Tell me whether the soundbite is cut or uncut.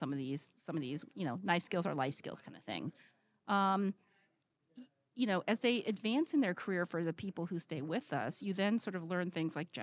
uncut